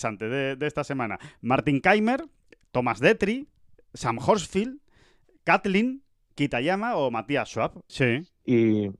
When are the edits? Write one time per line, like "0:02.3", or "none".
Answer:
0:07.9